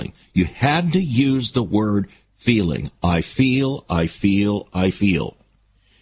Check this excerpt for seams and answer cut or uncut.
cut